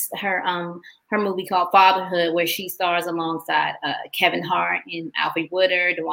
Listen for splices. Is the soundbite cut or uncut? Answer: cut